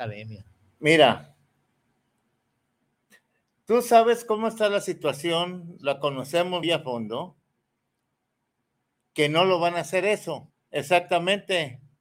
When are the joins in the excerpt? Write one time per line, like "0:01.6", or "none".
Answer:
0:06.6
0:10.5